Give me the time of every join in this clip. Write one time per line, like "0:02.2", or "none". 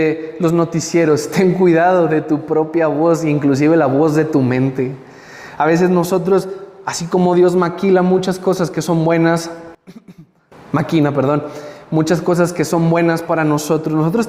none

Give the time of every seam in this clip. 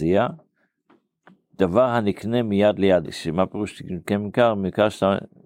0:03.0

